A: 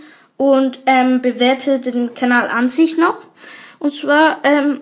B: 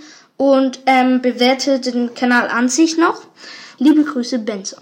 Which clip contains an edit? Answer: B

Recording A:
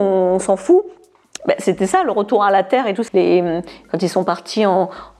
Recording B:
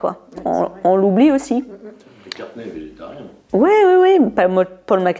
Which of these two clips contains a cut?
A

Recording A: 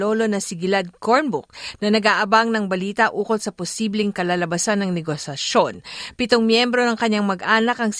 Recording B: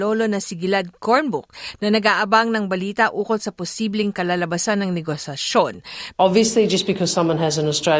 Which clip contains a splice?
B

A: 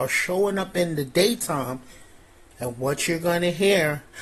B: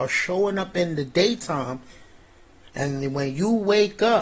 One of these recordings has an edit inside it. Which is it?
A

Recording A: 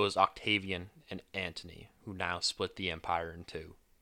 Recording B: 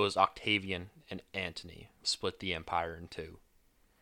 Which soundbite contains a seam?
B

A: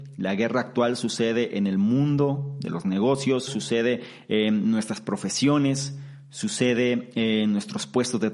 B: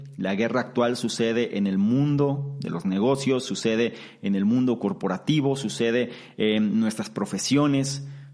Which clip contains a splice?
A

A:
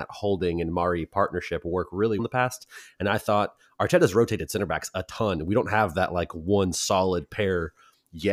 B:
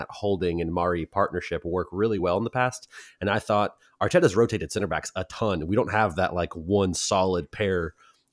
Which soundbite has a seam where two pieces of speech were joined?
A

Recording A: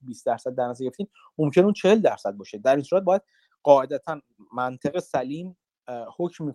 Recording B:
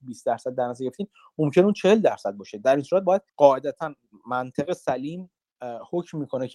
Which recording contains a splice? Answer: B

